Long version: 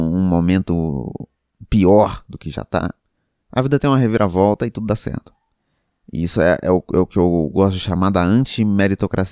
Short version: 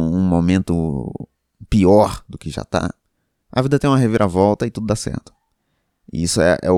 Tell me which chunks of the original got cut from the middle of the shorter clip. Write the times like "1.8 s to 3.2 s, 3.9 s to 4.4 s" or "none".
none

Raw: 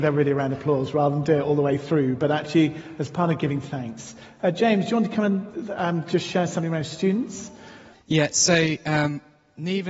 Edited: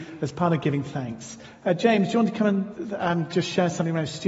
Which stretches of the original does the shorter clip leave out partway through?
none

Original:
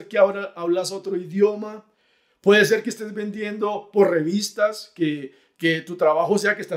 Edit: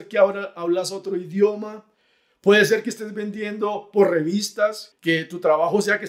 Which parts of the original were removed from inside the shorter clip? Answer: 4.9 s to 5.5 s

